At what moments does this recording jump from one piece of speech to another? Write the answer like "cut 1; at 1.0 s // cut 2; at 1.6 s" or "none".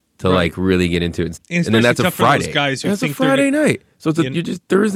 cut 1; at 1.3 s